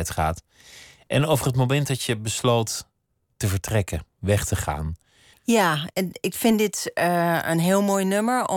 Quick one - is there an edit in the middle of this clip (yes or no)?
yes